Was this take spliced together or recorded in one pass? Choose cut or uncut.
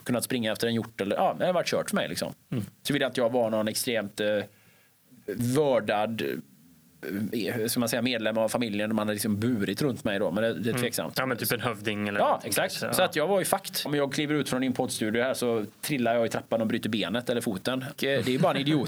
cut